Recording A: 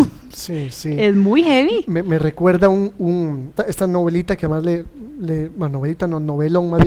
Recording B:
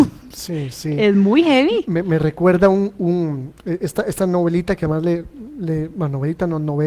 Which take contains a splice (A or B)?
A